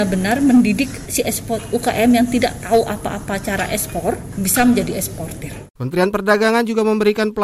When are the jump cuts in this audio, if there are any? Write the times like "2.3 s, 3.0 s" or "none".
none